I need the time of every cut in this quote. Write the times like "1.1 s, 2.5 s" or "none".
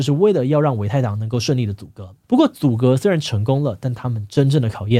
2.2 s